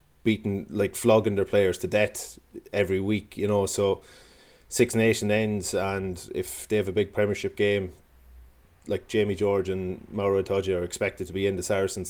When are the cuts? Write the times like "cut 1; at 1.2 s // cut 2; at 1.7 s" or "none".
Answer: none